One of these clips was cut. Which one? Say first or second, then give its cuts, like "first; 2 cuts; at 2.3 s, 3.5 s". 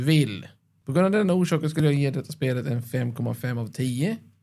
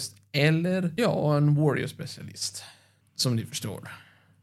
second; 1 cut; at 3.0 s